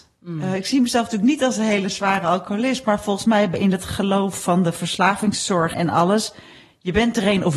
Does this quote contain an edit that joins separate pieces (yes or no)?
yes